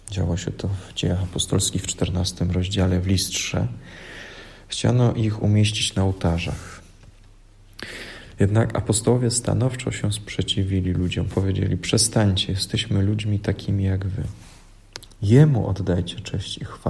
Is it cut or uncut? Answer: cut